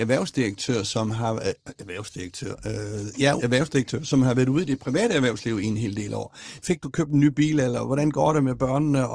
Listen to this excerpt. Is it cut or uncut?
cut